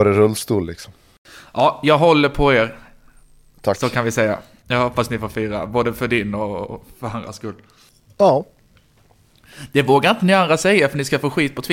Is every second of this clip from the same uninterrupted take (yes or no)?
yes